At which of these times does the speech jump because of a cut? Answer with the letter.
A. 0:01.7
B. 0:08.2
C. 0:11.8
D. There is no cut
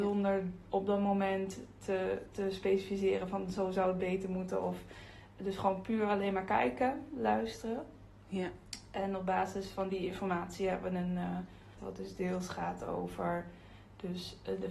C